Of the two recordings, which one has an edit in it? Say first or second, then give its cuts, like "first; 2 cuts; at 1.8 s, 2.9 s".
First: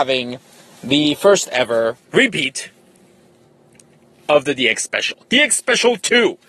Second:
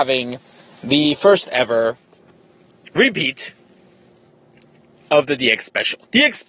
first; 1 cut; at 2.1 s